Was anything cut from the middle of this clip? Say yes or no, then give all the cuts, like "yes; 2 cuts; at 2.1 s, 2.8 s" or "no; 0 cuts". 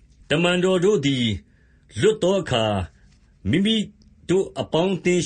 no; 0 cuts